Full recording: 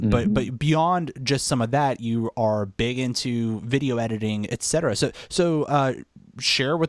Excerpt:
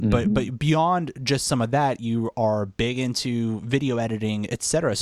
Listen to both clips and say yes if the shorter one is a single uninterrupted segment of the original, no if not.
yes